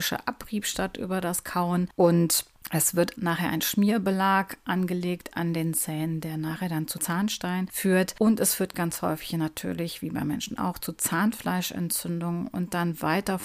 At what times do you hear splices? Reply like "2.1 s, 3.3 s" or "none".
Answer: 3.1 s